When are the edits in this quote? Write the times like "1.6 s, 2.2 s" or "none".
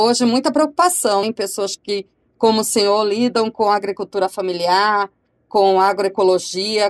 1.2 s